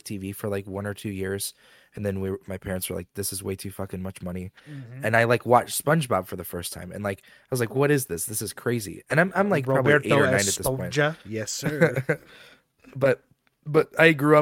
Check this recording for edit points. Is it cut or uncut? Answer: uncut